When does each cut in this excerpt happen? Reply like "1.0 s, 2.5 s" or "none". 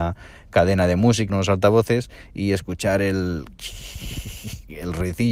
1.3 s